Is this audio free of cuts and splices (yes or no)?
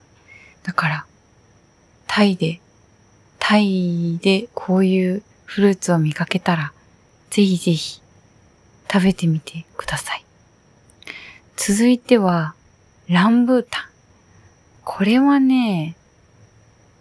yes